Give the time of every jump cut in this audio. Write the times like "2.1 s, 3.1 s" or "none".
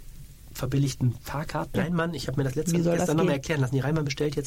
1.7 s

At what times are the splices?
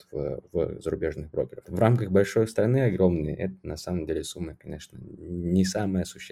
1.6 s

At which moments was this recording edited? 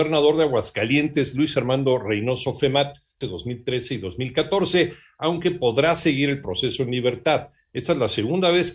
3.2 s

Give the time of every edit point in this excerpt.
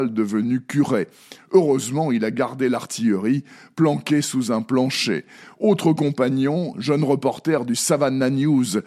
6.7 s

